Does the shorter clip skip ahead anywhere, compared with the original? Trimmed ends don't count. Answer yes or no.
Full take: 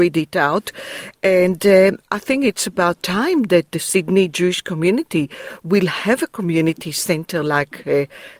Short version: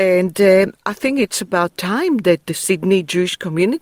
no